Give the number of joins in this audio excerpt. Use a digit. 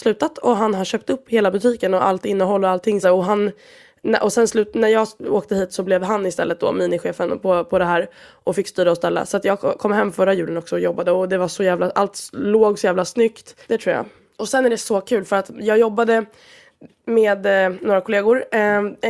2